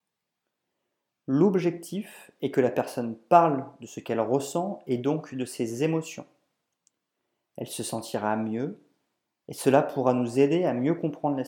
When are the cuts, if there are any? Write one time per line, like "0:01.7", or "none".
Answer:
none